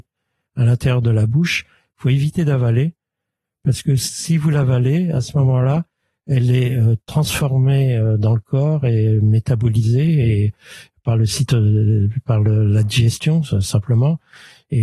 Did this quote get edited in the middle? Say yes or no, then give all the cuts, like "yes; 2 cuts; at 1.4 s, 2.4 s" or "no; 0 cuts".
no; 0 cuts